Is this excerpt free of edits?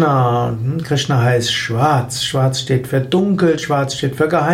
yes; 0 cuts

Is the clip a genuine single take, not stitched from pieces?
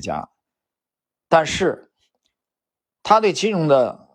yes; 0 cuts

